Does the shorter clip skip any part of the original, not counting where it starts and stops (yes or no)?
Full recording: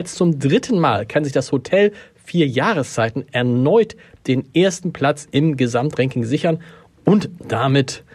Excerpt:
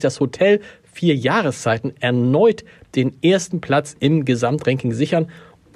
no